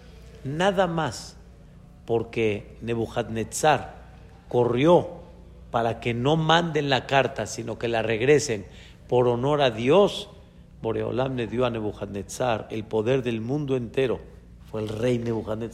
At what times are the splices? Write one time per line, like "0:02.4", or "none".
none